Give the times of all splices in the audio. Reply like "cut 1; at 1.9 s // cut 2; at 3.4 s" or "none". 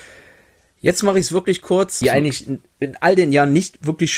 cut 1; at 2.0 s